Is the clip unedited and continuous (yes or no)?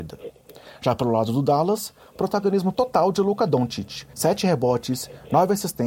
no